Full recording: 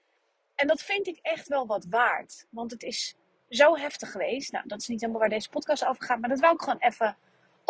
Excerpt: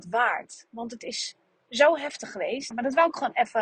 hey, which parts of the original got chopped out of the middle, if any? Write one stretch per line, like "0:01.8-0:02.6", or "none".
0:04.5-0:06.2